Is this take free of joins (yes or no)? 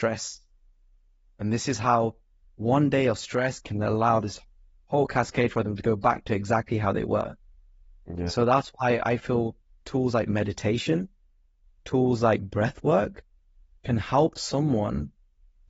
yes